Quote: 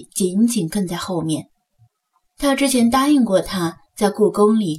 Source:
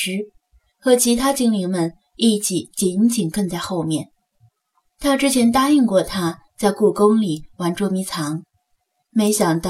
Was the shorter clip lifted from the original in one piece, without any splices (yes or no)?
yes